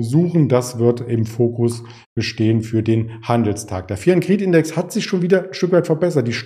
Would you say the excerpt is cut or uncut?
uncut